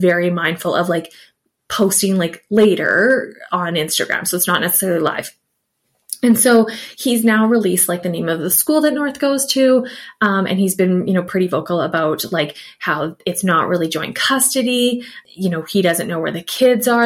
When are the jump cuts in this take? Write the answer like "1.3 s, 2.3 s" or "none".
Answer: none